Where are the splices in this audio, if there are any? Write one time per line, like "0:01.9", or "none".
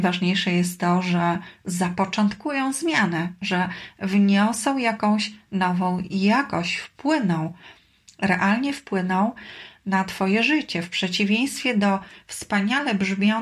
none